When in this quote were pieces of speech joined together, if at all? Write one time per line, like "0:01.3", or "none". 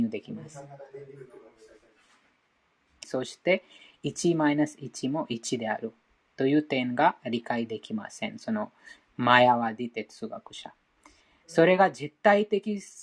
0:03.0